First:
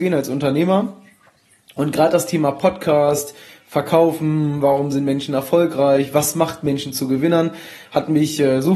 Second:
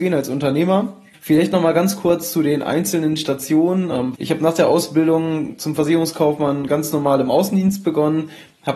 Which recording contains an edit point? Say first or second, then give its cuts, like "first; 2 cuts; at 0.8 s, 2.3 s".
second; 2 cuts; at 1.1 s, 4.1 s